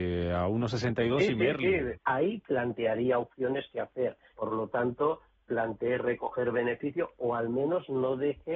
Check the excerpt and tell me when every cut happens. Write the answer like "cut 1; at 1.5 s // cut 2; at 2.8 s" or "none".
cut 1; at 1.9 s // cut 2; at 4.3 s